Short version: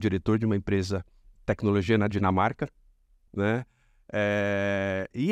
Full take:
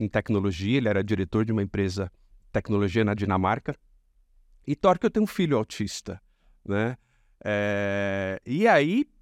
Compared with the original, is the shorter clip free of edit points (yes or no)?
no